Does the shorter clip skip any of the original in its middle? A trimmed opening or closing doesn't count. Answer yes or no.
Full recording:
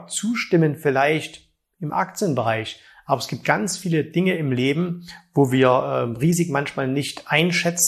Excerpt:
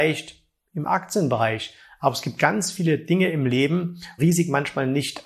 yes